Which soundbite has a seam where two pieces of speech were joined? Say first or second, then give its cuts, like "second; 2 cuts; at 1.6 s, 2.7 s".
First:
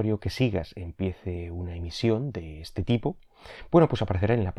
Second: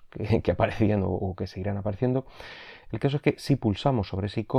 second; 1 cut; at 2.9 s